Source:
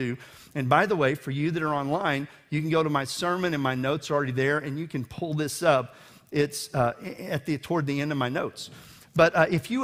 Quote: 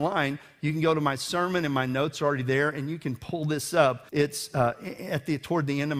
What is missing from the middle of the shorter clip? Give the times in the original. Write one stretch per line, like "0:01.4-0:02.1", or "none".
0:06.0-0:06.3